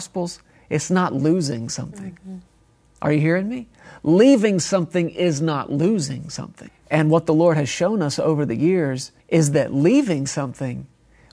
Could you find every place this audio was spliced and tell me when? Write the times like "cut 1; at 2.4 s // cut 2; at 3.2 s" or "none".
cut 1; at 6.7 s // cut 2; at 9.2 s